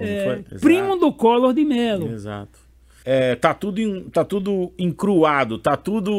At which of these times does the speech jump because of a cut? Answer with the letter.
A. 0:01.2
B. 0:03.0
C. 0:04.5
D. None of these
B